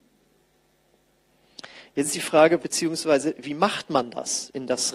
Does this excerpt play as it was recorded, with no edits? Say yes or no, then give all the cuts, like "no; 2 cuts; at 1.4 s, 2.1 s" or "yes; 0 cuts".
no; 1 cut; at 2.6 s